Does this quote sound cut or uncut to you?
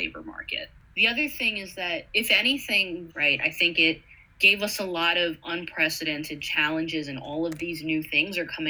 cut